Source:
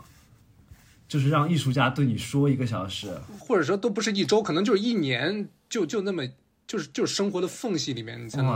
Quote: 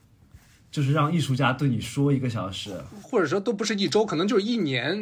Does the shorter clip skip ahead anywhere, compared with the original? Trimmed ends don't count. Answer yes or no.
no